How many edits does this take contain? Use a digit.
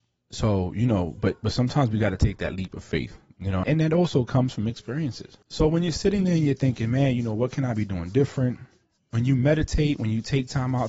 3